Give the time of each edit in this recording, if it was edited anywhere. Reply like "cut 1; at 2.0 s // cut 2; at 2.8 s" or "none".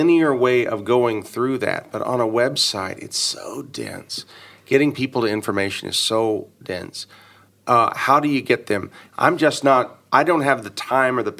cut 1; at 9.1 s